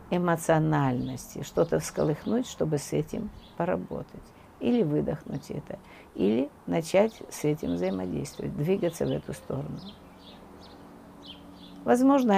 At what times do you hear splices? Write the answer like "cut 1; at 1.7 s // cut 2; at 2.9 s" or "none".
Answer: none